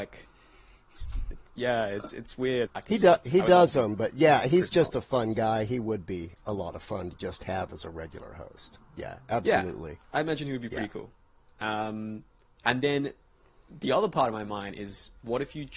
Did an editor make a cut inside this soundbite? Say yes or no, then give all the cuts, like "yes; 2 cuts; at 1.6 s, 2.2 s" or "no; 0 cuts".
yes; 1 cut; at 2.7 s